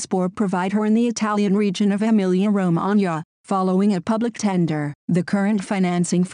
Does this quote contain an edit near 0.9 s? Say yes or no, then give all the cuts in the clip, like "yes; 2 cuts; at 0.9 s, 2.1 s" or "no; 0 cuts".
no; 1 cut; at 5.0 s